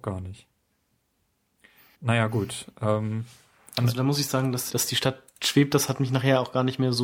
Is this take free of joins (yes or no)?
no